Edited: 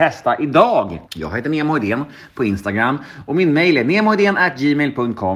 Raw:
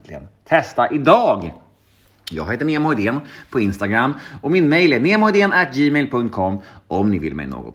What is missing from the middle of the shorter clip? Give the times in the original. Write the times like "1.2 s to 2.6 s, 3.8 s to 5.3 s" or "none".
1.6 s to 2.2 s

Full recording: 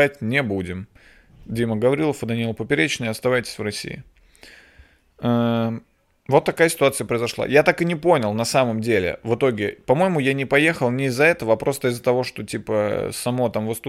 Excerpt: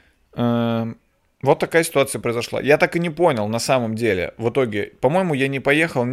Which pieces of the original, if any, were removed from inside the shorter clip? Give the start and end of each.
none

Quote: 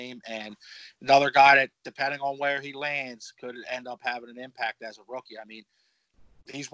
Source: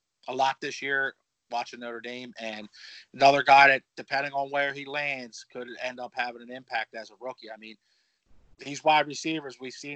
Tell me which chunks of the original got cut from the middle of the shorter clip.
none

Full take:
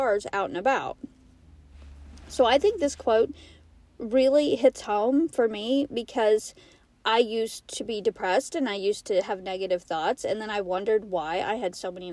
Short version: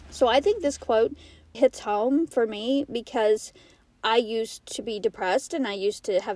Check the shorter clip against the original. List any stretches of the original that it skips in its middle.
3.7 s to 4.6 s

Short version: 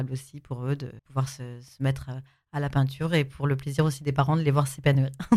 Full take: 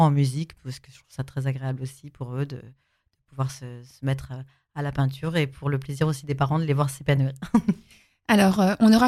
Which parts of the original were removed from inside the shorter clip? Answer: 2.7 s to 3.2 s

